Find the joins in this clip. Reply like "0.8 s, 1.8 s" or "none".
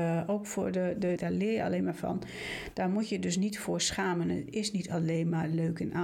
1.2 s